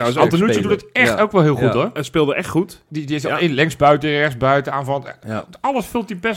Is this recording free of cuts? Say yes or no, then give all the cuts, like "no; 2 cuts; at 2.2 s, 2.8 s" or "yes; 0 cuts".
no; 1 cut; at 2.9 s